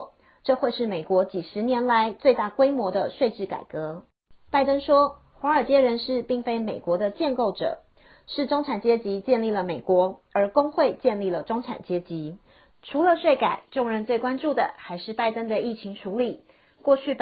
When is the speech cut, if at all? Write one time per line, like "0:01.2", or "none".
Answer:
0:04.5
0:12.7

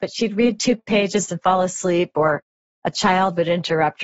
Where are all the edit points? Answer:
none

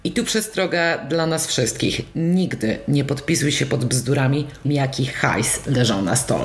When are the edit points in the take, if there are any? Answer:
0:04.6

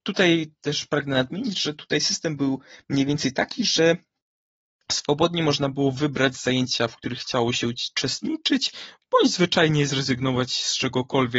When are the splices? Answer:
none

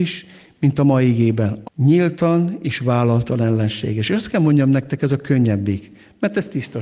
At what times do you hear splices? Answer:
0:01.6

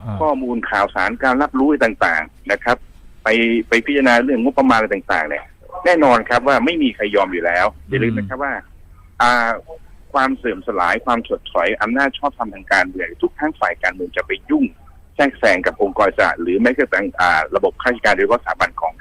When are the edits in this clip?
none

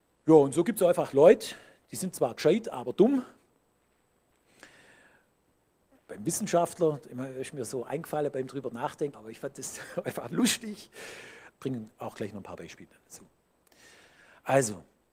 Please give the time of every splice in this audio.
0:09.1
0:11.5

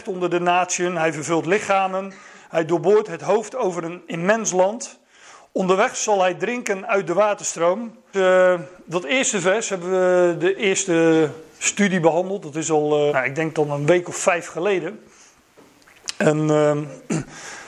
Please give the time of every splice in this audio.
0:08.1
0:13.1

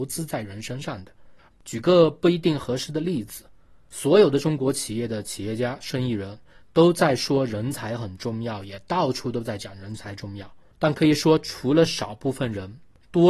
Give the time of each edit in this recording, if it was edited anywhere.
0:01.5
0:10.7

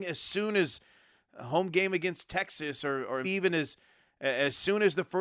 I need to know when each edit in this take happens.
0:03.2

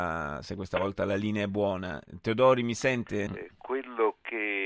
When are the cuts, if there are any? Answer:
0:03.3

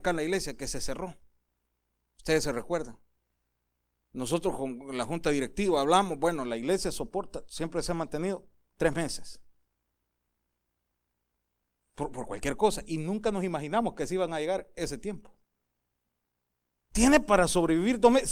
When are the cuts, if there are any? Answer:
0:16.8

